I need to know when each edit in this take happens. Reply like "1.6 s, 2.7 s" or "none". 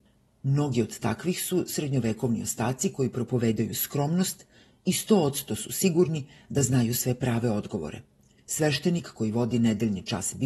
8.4 s